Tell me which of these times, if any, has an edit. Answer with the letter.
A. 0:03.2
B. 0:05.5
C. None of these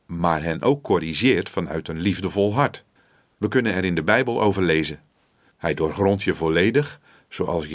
B